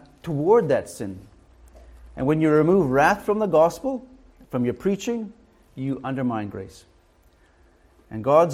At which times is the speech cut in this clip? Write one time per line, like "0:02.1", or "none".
none